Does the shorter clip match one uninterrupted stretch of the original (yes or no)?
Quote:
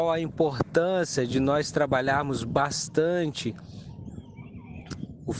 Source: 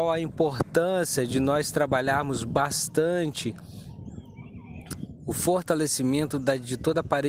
yes